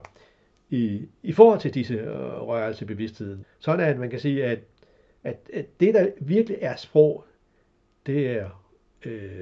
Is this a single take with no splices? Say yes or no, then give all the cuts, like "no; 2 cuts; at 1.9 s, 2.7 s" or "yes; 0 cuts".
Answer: no; 1 cut; at 3.4 s